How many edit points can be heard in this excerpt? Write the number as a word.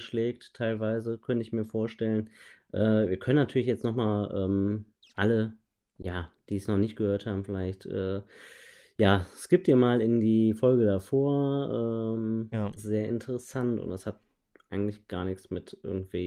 one